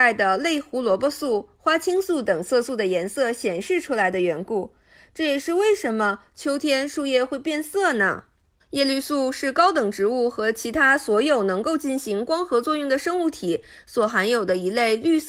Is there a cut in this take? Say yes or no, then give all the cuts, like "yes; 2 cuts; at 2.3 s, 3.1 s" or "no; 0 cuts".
yes; 1 cut; at 8.6 s